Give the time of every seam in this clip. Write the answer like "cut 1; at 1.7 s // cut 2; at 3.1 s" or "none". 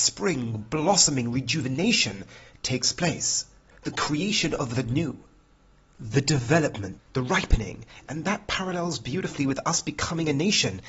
cut 1; at 5.9 s // cut 2; at 7.0 s

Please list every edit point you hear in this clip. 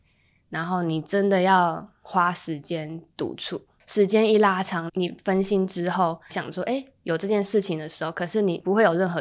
cut 1; at 4.9 s // cut 2; at 6.3 s

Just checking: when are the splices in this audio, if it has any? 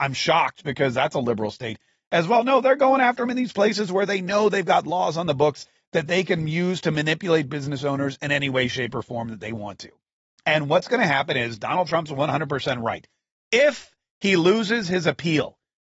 none

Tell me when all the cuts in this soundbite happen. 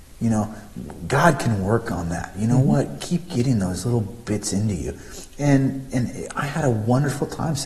none

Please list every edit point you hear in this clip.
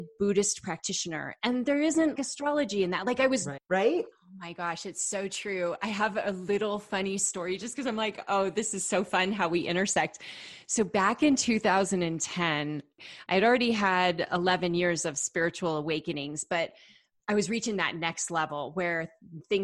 cut 1; at 2.2 s // cut 2; at 3.6 s

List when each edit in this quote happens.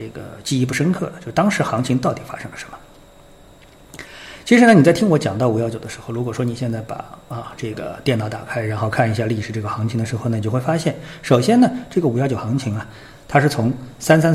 none

